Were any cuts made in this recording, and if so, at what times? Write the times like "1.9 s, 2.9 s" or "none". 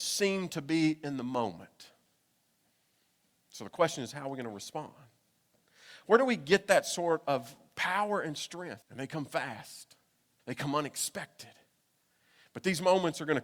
6.0 s, 8.8 s, 10.4 s